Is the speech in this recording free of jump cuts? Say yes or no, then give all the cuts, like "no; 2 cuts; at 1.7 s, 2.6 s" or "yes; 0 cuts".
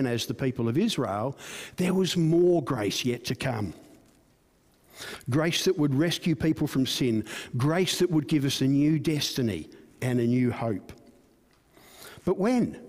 yes; 0 cuts